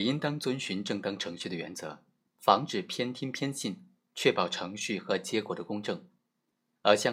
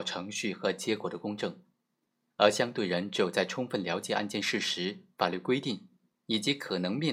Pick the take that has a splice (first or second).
first